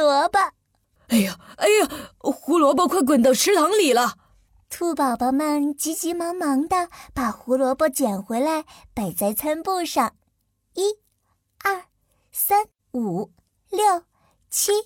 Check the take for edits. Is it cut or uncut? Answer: cut